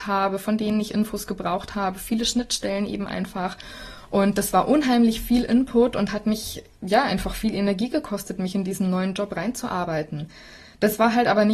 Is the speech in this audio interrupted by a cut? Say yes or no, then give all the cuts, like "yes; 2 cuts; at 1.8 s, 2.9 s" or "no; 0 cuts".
no; 0 cuts